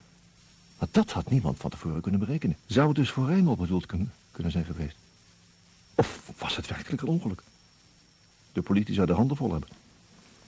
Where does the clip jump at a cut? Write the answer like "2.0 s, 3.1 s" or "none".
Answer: 2.6 s